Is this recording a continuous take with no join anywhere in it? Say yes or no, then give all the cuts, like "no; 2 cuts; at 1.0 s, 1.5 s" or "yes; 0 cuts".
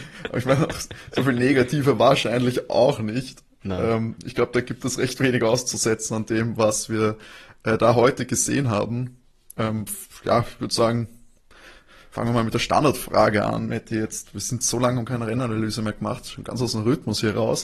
yes; 0 cuts